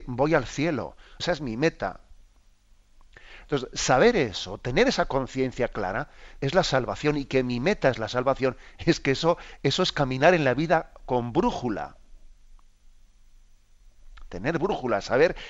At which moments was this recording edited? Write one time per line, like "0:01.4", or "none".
0:01.2
0:06.4